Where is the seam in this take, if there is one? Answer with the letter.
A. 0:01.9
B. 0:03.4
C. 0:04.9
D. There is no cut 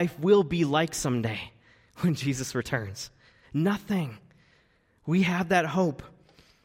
B